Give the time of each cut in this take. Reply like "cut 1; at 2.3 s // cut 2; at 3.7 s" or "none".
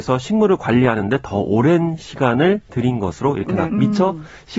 cut 1; at 3.7 s